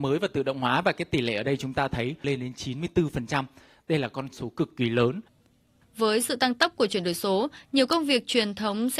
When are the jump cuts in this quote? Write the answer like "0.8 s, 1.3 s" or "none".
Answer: none